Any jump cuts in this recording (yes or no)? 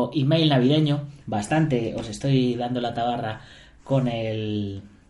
yes